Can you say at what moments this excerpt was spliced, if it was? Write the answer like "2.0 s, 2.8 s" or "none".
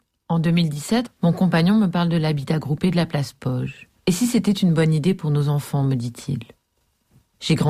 1.1 s, 4.0 s